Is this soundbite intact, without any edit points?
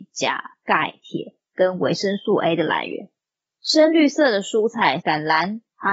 no; 2 cuts; at 3.5 s, 5.0 s

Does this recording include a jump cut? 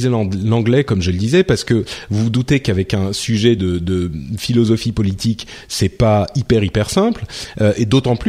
no; 0 cuts

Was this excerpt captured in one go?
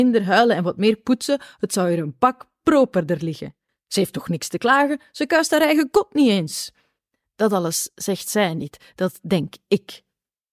yes; 0 cuts

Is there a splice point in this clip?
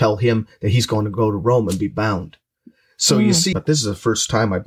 yes; 1 cut; at 3.5 s

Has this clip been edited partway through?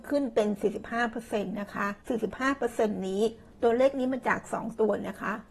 yes; 1 cut; at 2.0 s

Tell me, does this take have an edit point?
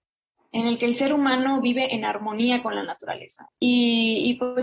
yes; 1 cut; at 3.5 s

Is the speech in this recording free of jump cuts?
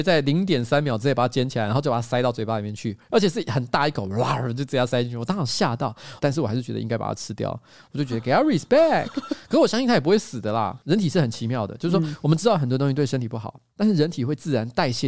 no; 1 cut; at 6.2 s

